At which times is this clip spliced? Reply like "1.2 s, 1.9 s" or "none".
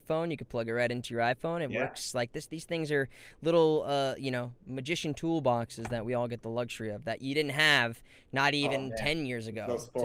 none

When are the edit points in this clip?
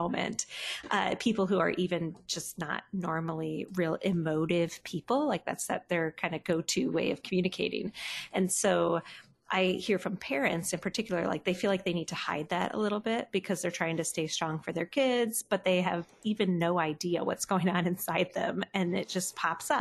none

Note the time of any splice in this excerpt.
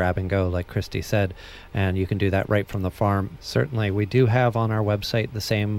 3.3 s

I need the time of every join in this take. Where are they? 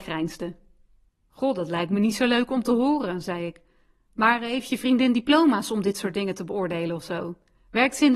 1.1 s

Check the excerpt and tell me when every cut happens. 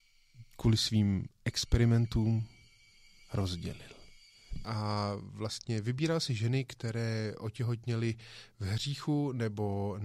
4.6 s

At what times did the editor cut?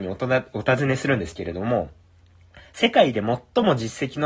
none

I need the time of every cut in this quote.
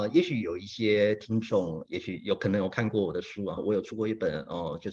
3.6 s

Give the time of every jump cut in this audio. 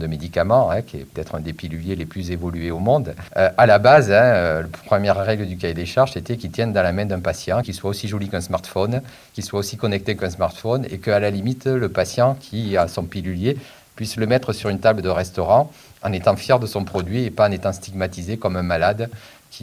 7.6 s

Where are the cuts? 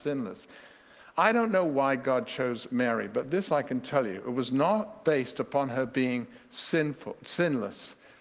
none

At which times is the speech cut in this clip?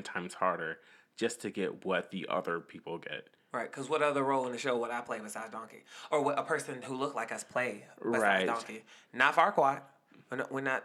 none

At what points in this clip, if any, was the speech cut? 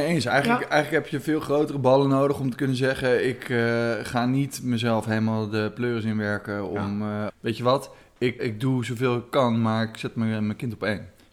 7.3 s, 8.4 s

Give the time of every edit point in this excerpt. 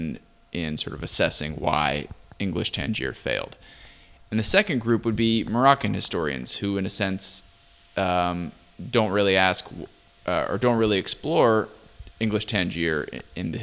none

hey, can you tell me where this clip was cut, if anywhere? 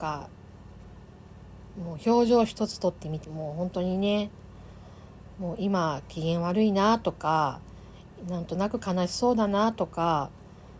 3.2 s

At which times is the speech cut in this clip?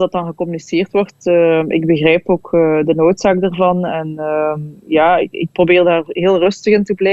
none

